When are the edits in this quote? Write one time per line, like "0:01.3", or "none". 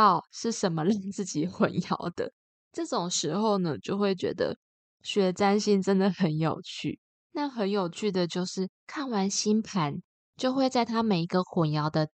0:07.2
0:08.7